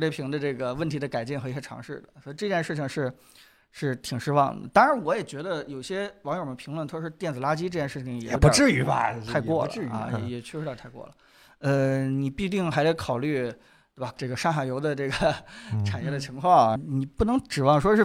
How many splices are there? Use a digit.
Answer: 2